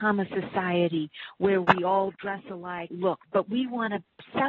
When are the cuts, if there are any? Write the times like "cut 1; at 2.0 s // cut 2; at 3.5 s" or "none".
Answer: cut 1; at 2.9 s